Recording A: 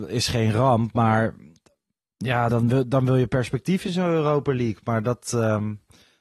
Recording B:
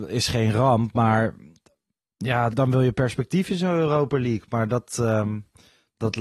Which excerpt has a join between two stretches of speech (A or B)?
B